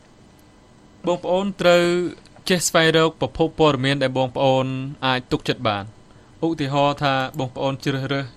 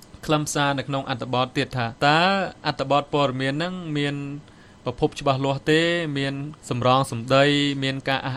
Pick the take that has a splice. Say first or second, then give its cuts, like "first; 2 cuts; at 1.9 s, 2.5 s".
second; 2 cuts; at 2.0 s, 6.6 s